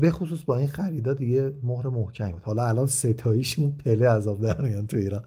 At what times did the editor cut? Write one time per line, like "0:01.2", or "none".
none